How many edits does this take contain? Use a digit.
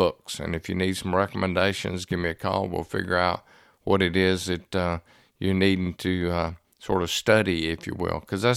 0